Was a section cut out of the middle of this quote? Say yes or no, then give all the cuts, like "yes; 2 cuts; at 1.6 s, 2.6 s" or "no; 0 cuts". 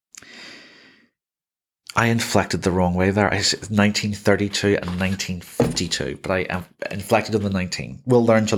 no; 0 cuts